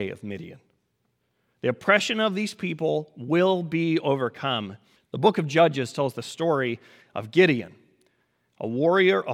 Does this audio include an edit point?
yes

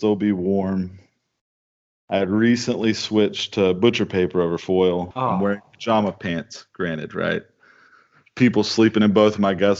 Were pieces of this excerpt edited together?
yes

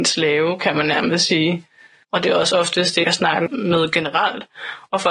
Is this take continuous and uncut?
no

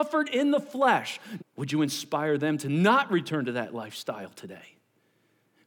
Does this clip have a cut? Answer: yes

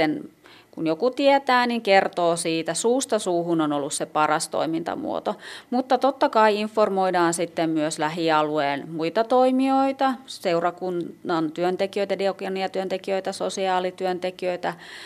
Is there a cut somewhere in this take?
no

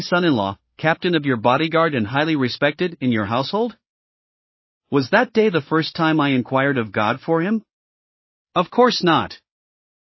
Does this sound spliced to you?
no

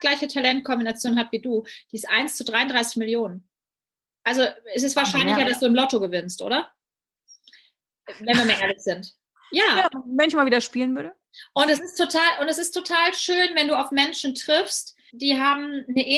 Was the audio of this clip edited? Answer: yes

